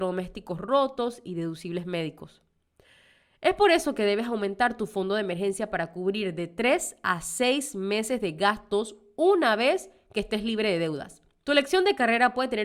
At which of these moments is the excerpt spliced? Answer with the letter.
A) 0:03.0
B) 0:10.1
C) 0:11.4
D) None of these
C